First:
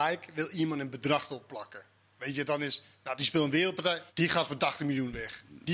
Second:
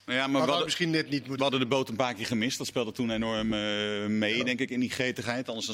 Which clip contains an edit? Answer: first; 1 cut; at 4.1 s

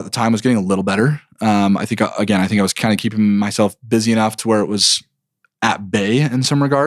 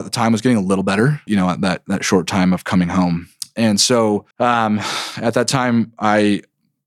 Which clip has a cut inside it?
second; 2 cuts; at 1.3 s, 4.3 s

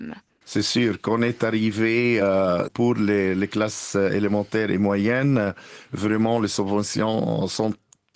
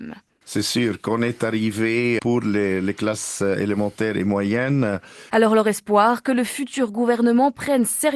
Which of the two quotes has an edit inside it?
second; 2 cuts; at 2.2 s, 5.3 s

